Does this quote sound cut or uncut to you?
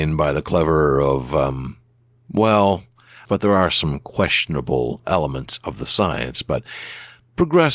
cut